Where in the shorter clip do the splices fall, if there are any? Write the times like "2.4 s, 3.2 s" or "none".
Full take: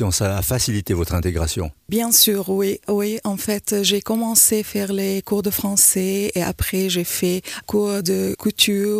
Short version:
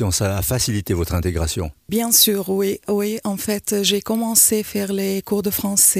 none